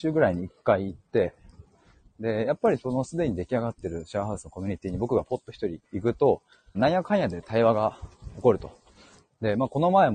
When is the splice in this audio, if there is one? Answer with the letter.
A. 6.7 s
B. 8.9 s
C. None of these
A